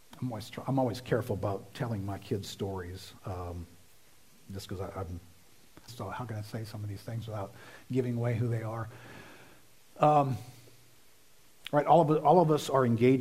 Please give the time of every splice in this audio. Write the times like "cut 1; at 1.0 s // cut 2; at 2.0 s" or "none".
cut 1; at 5.9 s